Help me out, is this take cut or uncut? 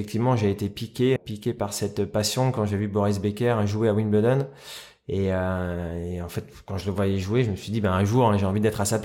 cut